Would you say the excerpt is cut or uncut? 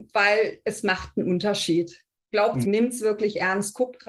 cut